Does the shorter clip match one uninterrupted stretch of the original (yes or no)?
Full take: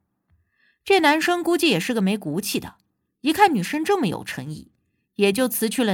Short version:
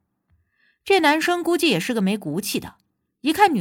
yes